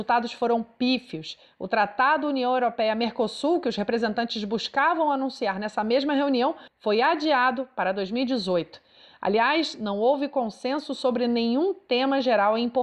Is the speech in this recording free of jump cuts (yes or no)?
yes